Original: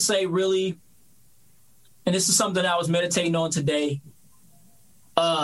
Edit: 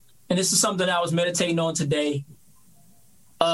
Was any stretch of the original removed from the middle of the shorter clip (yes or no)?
no